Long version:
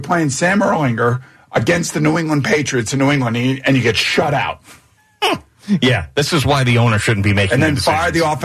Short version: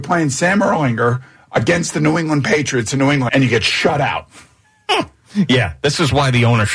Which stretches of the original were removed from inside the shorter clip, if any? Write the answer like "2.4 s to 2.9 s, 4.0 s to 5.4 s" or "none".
3.3 s to 3.6 s

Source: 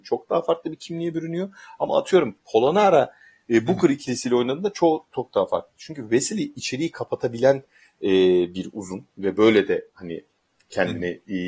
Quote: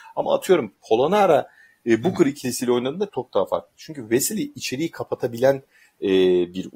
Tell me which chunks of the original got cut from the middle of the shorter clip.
4.7 s to 5.1 s

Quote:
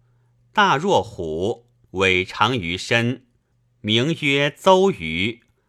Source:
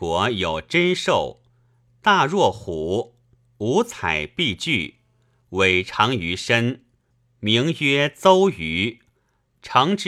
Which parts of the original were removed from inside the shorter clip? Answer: 3.3 s to 5.4 s

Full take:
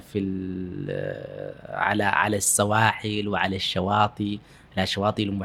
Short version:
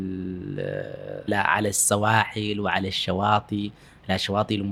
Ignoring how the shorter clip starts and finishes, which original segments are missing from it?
1.6 s to 2.0 s

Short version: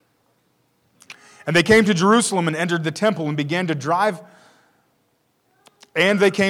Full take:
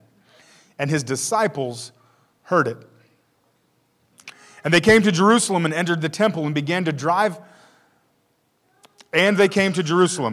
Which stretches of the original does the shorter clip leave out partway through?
none

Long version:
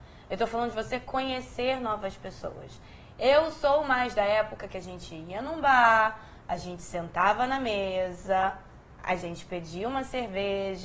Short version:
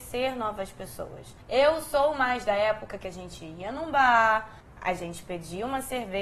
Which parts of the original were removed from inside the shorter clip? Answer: 2.9 s to 3.1 s, 6.3 s to 8.8 s

